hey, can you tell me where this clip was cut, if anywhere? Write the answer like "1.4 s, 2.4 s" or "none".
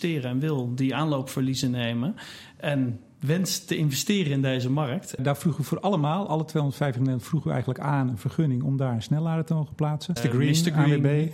5.2 s, 10.2 s